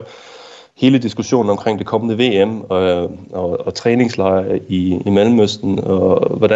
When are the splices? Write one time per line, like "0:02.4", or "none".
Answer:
none